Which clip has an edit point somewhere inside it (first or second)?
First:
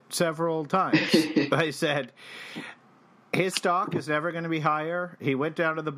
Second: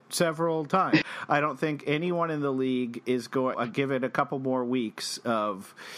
second